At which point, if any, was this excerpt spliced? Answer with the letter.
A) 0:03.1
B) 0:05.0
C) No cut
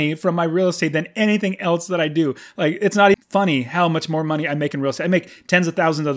A